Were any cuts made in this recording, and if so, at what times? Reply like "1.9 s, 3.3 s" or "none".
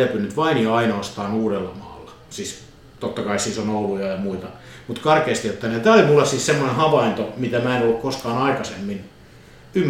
none